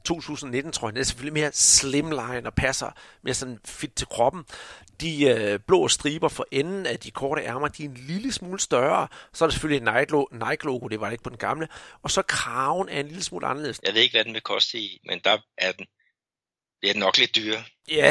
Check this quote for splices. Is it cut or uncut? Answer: cut